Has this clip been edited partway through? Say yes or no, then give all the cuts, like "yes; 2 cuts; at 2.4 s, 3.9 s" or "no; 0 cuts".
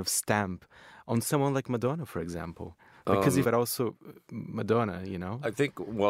yes; 1 cut; at 3.4 s